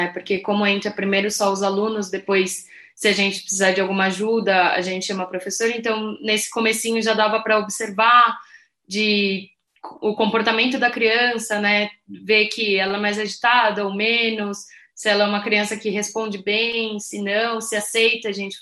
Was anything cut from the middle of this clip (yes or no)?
no